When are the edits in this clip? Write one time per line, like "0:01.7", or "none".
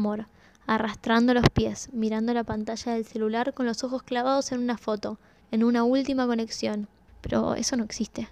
0:05.4
0:07.1